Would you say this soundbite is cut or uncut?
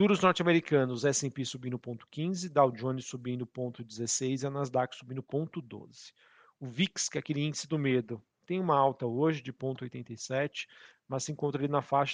cut